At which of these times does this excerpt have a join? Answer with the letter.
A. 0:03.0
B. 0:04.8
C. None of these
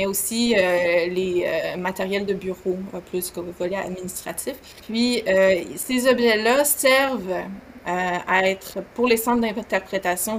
B